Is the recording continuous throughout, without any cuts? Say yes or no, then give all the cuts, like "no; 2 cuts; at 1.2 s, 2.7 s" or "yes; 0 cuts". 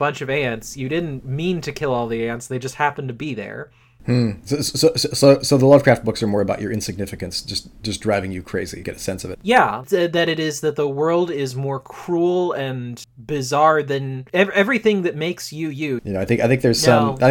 no; 1 cut; at 16.0 s